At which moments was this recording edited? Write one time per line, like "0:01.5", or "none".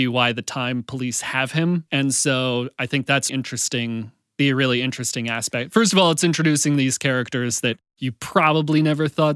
0:03.3